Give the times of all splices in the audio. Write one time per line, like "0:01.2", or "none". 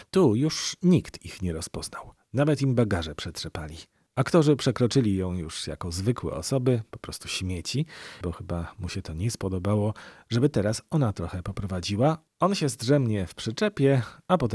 0:08.2

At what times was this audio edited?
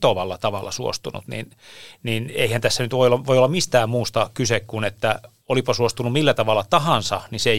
none

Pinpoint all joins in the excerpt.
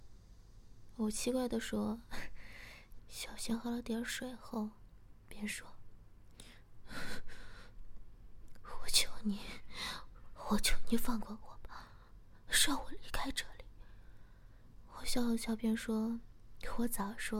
0:03.0

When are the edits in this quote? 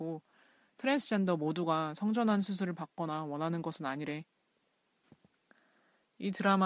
none

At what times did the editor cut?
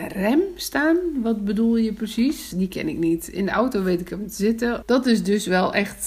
0:02.5
0:04.8

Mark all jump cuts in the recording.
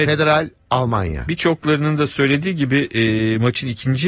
none

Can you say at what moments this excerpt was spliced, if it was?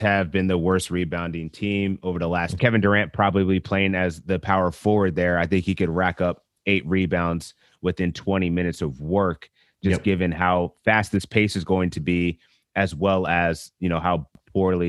0:02.6

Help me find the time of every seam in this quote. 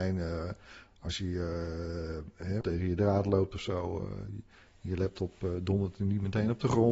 0:02.6

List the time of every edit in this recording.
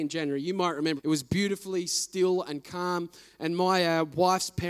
0:01.0

